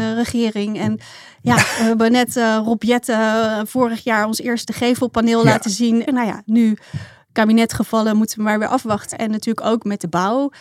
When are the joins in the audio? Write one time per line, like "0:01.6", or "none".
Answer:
0:06.1
0:09.1